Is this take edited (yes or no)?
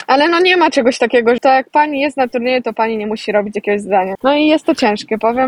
yes